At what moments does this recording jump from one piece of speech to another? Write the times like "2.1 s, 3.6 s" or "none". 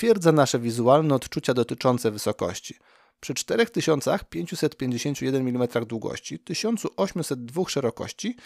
none